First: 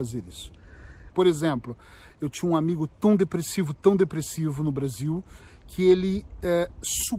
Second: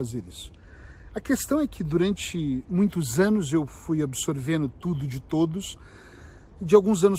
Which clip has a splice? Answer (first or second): first